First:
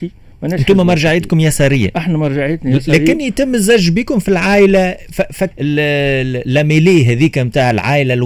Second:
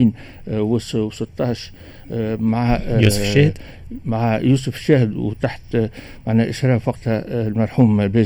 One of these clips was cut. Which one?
first; 1 cut; at 5.5 s

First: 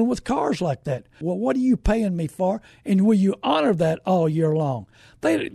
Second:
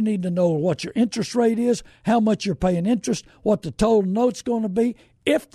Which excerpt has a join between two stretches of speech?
first; 1 cut; at 1.2 s

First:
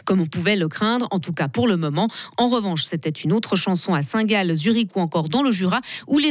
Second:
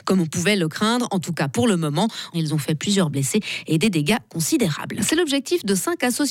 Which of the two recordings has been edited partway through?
second; 2 cuts; at 2.3 s, 5.0 s

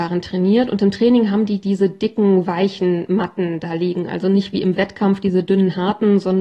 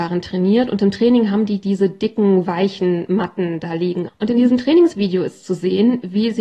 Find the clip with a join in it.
second; 1 cut; at 4.1 s

